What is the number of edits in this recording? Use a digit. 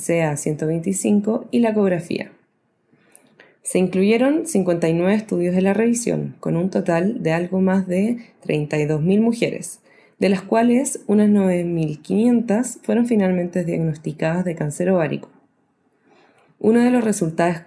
0